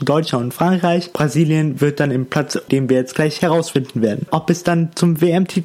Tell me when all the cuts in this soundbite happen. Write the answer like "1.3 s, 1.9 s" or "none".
1.1 s, 2.7 s, 4.3 s

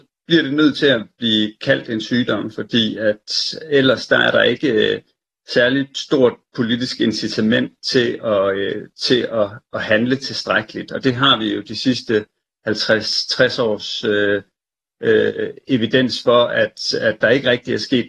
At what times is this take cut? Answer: none

